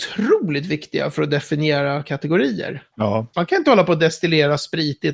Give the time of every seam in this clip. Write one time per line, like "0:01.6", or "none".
0:03.3